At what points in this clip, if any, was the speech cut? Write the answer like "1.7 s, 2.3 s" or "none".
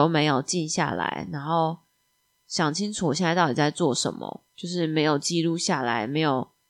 4.5 s